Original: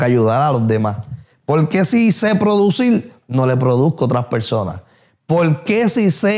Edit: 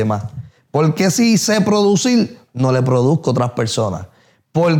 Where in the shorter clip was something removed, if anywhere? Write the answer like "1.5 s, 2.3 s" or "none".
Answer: none